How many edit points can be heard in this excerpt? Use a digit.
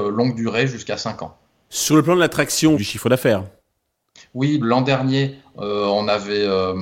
3